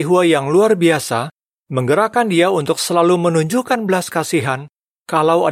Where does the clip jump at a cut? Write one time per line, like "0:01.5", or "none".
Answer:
none